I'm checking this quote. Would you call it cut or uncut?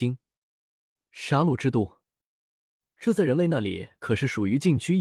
uncut